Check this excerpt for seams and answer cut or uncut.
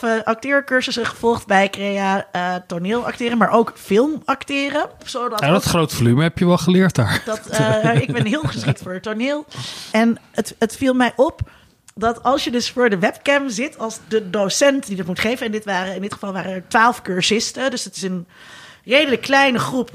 cut